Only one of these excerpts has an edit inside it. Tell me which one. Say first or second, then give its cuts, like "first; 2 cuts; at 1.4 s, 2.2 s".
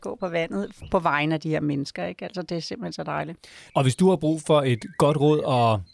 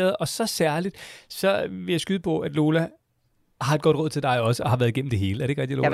first; 1 cut; at 3.7 s